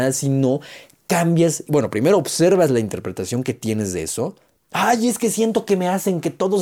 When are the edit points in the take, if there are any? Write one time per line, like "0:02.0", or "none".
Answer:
none